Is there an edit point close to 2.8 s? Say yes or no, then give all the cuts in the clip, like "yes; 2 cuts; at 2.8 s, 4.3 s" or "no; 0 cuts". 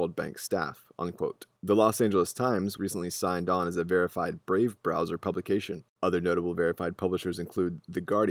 yes; 3 cuts; at 1.6 s, 2.8 s, 5.9 s